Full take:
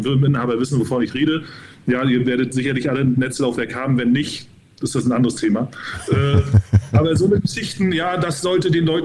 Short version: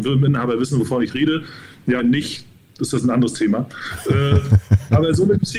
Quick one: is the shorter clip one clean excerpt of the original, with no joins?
no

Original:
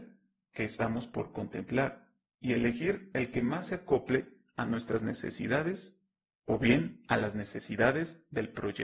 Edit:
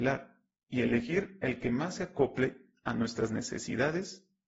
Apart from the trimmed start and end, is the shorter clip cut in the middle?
no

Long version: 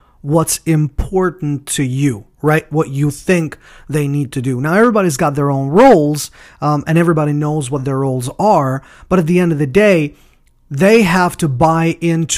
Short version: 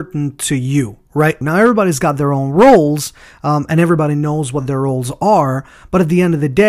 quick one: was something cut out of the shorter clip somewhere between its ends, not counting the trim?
yes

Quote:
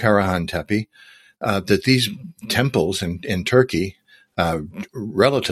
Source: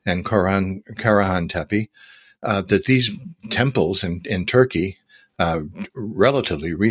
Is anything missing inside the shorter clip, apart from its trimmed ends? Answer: no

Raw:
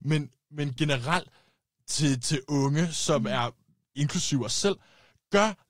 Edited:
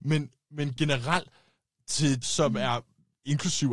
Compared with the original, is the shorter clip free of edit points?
no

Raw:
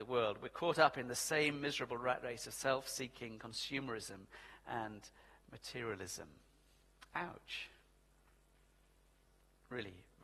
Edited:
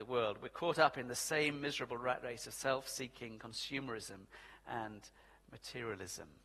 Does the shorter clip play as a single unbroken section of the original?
yes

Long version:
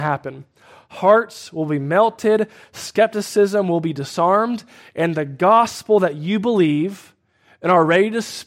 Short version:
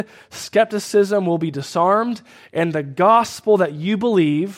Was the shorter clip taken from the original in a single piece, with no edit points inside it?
yes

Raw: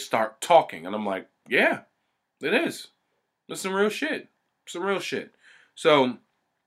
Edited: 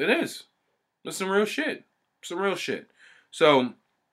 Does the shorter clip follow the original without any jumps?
yes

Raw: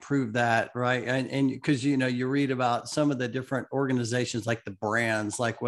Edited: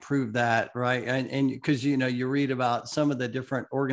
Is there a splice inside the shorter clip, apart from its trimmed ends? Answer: no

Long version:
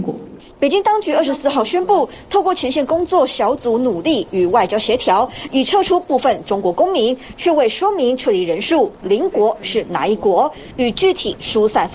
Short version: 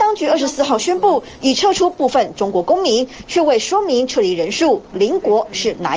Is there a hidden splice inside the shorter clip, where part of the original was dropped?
yes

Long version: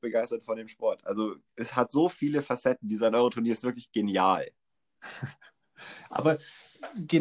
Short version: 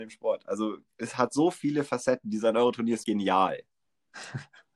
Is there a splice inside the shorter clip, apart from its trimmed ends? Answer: yes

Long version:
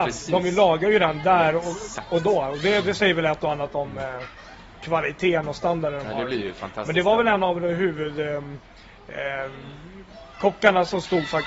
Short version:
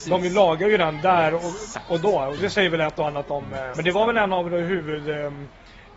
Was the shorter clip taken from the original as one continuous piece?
no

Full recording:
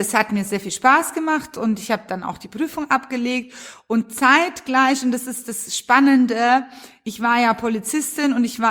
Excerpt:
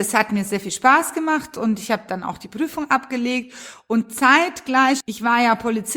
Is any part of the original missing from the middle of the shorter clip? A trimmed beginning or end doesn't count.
yes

